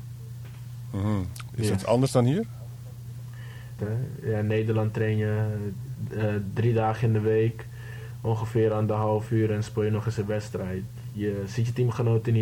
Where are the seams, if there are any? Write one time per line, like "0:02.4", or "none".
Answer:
0:01.5
0:03.8

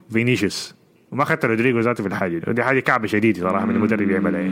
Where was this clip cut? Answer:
0:02.4

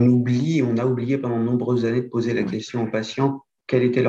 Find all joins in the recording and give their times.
none

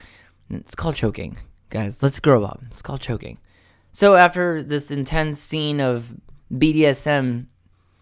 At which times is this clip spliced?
none

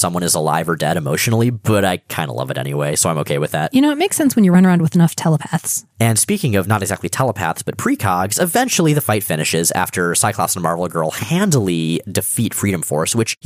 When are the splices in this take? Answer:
none

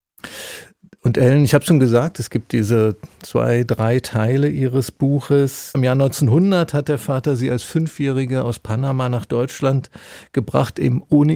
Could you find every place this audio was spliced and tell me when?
0:05.7

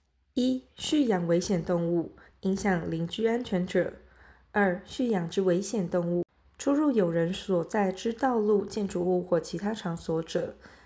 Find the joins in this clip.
none

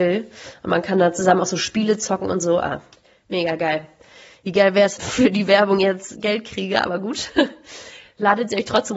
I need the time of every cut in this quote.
0:05.0

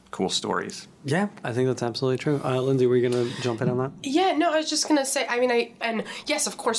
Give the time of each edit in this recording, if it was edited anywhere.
0:05.8

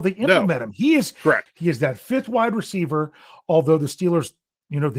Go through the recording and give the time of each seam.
0:01.5

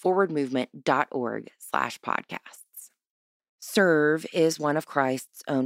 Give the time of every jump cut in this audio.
0:03.4

